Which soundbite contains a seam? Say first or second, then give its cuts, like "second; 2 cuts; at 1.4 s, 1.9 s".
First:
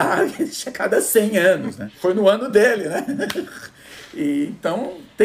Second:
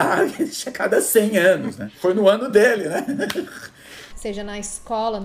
second; 1 cut; at 4.1 s